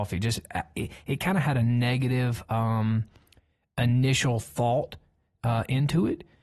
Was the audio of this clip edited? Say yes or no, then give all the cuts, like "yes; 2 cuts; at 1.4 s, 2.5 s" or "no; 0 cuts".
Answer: no; 0 cuts